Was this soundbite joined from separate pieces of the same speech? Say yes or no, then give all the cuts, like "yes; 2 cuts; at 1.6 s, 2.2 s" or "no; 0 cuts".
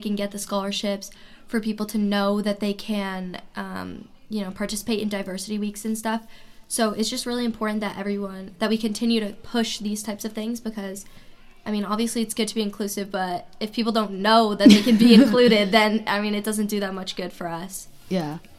no; 0 cuts